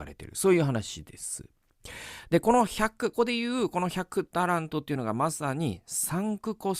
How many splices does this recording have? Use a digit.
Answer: 1